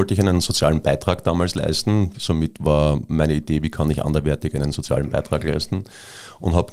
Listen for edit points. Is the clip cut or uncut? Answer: cut